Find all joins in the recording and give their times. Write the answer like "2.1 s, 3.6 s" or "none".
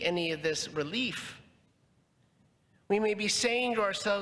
none